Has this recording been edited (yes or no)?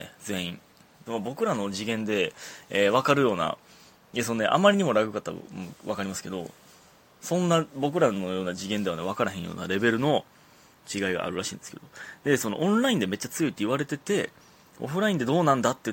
yes